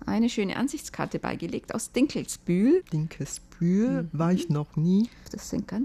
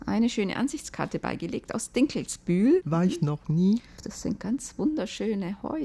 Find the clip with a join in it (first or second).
second